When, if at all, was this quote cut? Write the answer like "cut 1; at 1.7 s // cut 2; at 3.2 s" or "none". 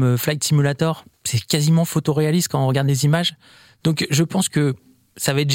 cut 1; at 1.1 s